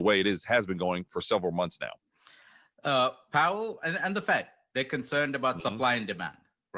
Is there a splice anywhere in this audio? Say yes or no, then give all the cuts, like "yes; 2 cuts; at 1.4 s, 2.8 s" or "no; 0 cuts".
no; 0 cuts